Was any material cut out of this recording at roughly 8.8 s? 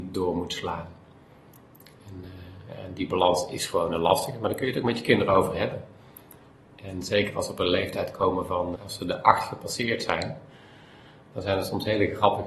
yes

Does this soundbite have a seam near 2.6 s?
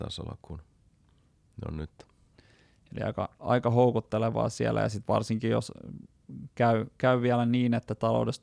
no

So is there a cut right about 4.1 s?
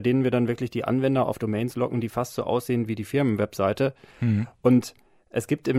yes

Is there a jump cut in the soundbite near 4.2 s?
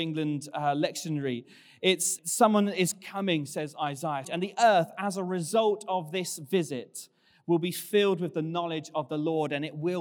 yes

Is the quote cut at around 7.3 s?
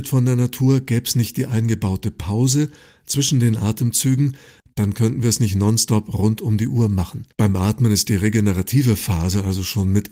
yes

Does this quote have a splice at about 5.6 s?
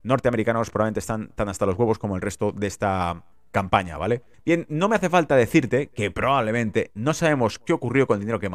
no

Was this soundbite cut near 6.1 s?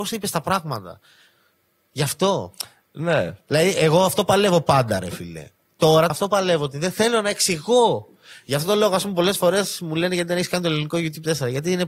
yes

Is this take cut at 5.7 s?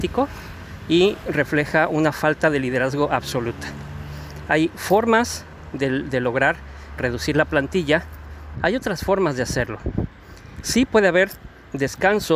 no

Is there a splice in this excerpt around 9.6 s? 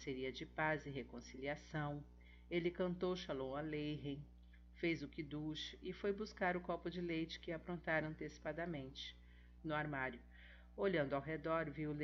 yes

